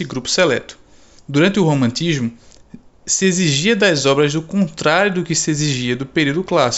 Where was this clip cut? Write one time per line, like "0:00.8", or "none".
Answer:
0:01.2